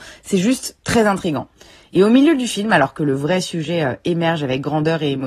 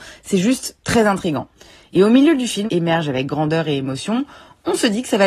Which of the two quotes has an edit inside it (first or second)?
second